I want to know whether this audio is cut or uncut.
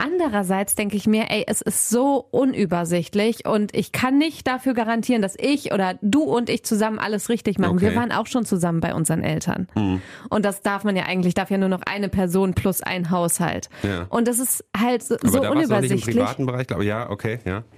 uncut